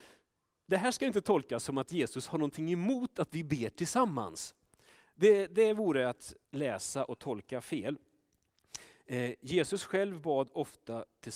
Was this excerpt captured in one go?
no; 1 cut; at 6.4 s

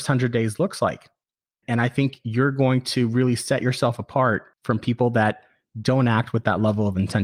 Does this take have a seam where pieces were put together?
yes; 2 cuts; at 1.6 s, 4.5 s

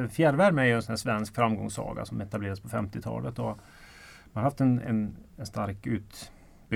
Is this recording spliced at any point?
no; 0 cuts

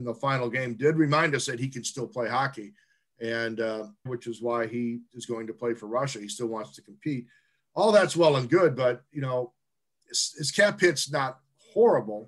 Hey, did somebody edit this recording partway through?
yes; 1 cut; at 4.1 s

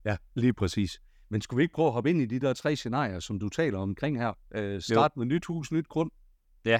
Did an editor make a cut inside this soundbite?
no; 0 cuts

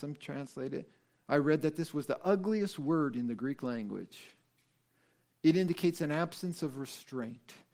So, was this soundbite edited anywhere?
no; 0 cuts

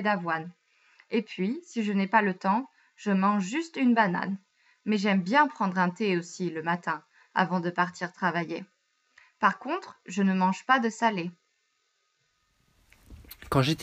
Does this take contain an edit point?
no; 0 cuts

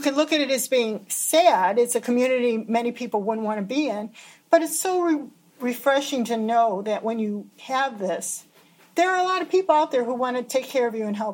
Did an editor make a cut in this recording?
yes; 1 cut; at 7.5 s

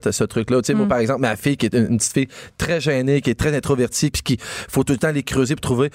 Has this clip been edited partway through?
yes; 2 cuts; at 1.7 s, 4.1 s

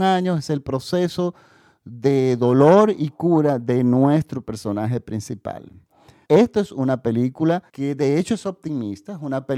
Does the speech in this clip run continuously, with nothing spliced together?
no; 2 cuts; at 6.2 s, 7.7 s

